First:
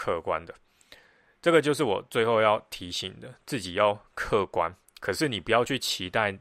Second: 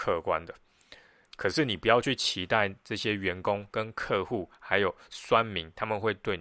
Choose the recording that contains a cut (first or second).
second